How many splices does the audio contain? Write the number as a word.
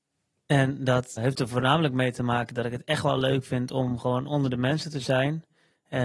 one